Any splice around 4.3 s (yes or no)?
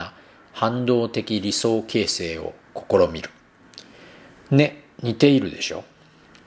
yes